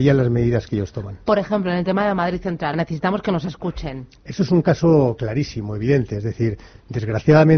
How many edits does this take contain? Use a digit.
1